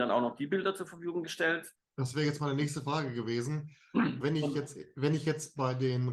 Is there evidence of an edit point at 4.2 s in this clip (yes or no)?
yes